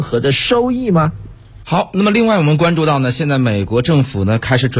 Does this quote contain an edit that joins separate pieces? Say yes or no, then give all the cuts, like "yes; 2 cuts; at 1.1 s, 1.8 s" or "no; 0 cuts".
yes; 1 cut; at 1.6 s